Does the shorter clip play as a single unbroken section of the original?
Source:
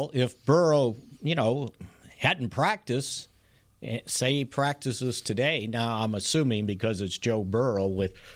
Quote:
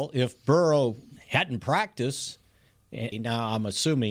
no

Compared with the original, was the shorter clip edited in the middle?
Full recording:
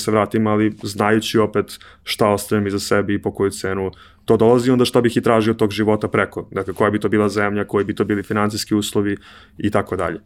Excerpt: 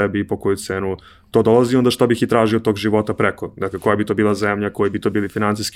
no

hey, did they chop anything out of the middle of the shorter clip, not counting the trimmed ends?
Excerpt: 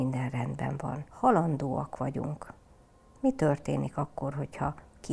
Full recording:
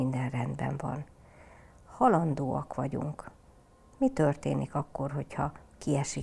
yes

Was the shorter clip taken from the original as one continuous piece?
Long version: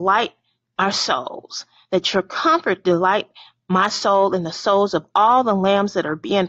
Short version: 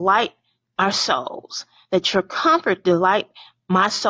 yes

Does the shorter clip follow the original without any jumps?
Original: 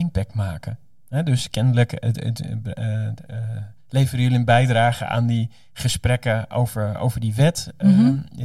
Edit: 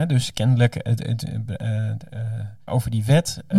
no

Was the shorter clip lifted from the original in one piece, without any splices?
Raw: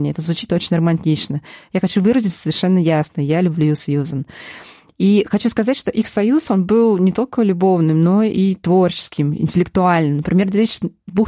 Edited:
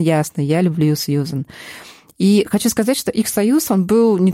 yes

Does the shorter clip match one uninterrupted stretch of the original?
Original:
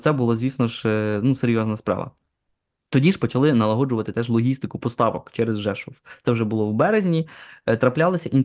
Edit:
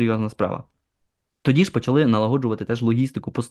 yes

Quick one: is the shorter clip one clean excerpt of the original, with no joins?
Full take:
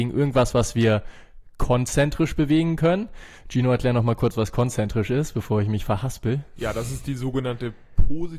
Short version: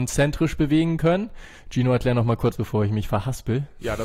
no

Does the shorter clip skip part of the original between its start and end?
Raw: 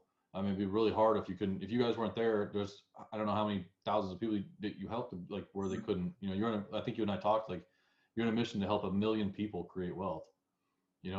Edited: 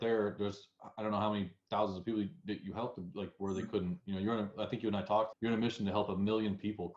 yes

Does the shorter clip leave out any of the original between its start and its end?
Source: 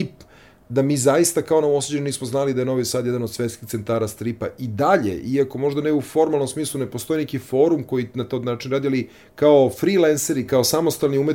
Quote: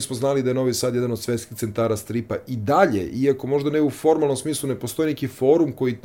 no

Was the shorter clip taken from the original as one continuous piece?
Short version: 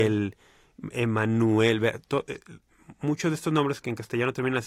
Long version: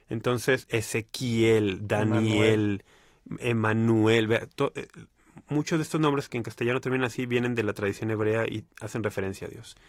yes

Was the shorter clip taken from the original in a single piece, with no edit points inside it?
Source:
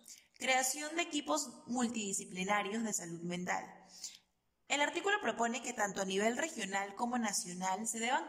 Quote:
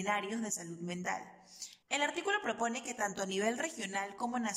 no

